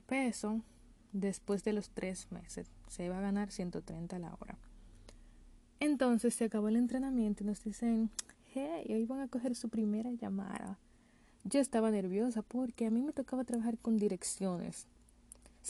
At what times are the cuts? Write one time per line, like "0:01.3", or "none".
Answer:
none